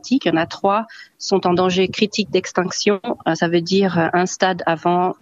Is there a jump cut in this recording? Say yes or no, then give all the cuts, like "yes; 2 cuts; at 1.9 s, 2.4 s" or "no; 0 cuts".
no; 0 cuts